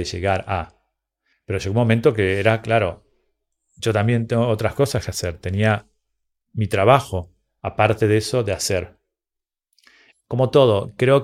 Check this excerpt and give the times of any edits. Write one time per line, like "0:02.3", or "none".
0:01.3